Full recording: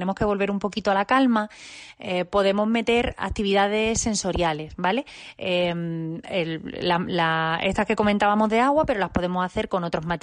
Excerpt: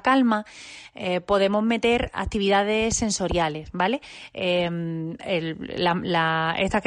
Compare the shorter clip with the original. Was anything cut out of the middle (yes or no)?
no